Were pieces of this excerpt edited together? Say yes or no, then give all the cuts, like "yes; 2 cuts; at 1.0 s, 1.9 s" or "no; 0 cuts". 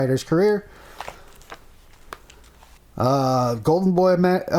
yes; 1 cut; at 2.8 s